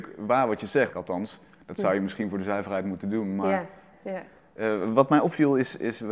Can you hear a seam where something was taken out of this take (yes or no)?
yes